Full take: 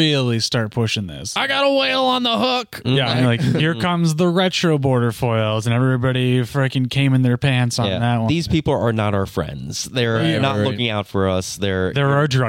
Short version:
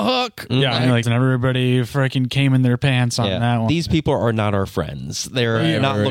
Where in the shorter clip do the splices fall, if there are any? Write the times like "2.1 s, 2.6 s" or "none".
1.0 s